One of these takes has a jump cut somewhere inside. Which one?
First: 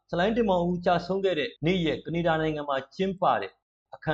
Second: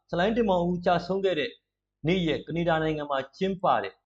first; 1 cut; at 1.6 s

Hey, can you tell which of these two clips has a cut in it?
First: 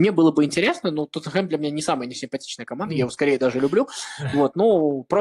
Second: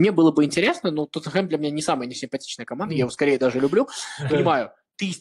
second; 1 cut; at 4.3 s

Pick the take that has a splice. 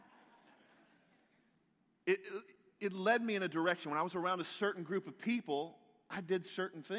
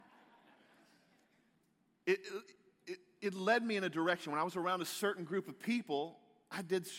first; 1 cut; at 2.8 s

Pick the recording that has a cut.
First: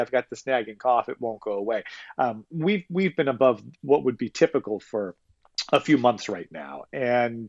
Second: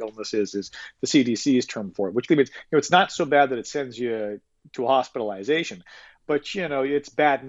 second; 1 cut; at 2.3 s

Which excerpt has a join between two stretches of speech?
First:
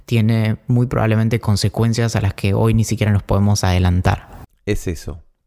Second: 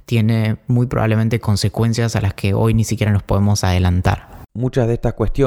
first; 1 cut; at 4.5 s

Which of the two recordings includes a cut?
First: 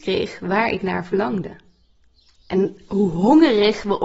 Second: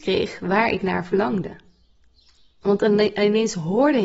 first; 1 cut; at 2.4 s

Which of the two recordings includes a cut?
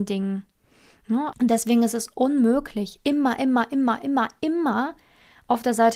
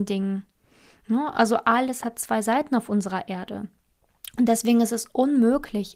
first; 1 cut; at 1.3 s

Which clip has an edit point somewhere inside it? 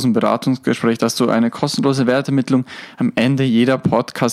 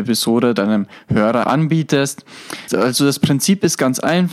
second; 2 cuts; at 1.4 s, 2.7 s

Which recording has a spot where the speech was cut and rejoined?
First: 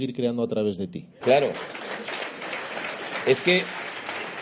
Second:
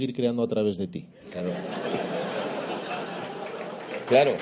first; 1 cut; at 1.2 s

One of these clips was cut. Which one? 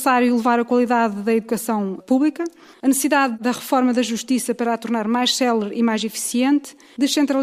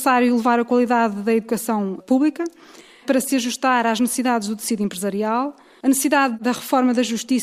first; 1 cut; at 2.7 s

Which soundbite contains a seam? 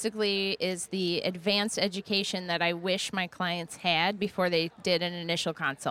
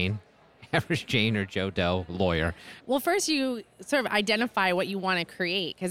second; 1 cut; at 2.8 s

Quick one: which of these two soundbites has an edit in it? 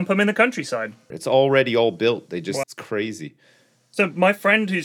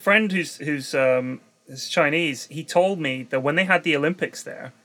first; 2 cuts; at 1.1 s, 2.6 s

